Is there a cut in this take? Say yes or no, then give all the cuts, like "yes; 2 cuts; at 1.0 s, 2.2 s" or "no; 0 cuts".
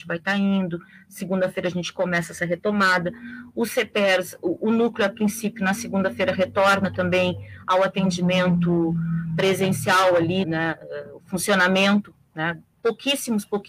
yes; 2 cuts; at 10.4 s, 12.7 s